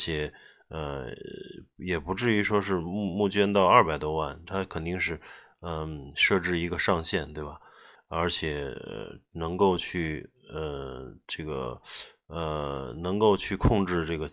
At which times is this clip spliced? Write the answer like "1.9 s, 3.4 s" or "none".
8.0 s